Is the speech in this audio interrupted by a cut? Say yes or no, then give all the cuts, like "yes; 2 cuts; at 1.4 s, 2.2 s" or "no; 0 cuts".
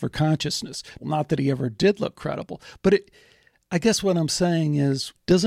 yes; 1 cut; at 1.0 s